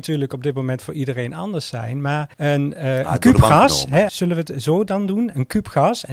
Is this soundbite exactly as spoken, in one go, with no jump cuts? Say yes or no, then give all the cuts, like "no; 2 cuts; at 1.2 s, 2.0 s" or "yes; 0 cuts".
no; 2 cuts; at 2.3 s, 4.1 s